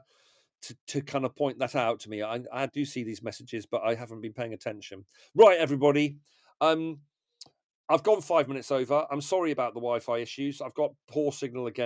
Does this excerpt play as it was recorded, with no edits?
yes; 0 cuts

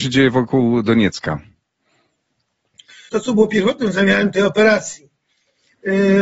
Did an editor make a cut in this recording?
yes; 1 cut; at 3.1 s

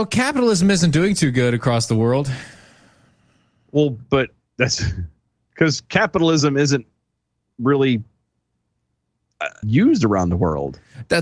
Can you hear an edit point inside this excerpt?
yes; 1 cut; at 9.6 s

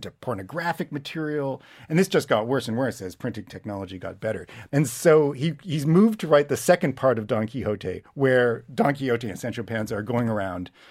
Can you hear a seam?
yes; 1 cut; at 4.7 s

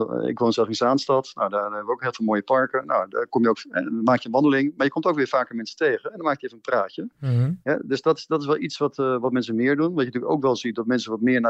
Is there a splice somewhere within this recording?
no; 0 cuts

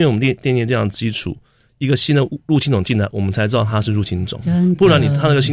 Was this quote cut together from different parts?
no; 0 cuts

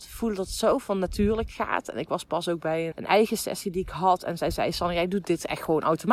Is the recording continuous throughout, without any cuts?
no; 1 cut; at 2.9 s

